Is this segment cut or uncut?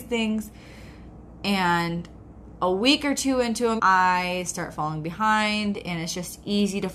cut